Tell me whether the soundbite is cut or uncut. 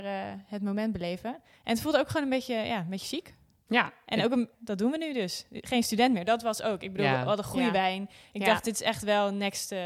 cut